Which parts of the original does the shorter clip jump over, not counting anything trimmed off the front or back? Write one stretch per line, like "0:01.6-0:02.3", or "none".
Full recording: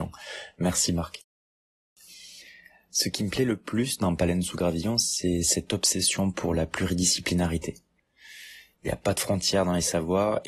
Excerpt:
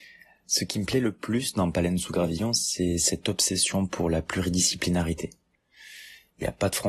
none